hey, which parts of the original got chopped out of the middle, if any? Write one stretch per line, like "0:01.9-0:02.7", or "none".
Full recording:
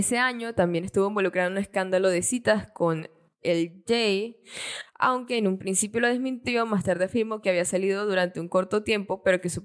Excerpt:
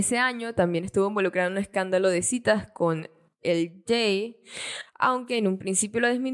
none